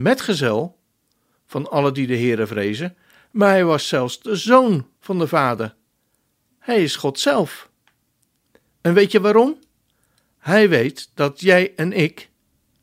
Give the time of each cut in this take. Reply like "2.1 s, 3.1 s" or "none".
8.7 s